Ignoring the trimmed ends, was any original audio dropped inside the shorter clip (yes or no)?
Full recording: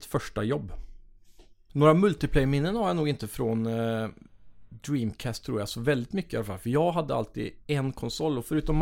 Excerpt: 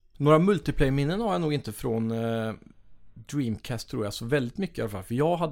no